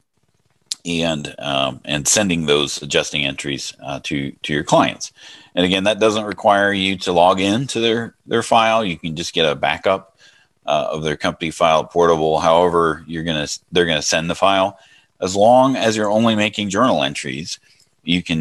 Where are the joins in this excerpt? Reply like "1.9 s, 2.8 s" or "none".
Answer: none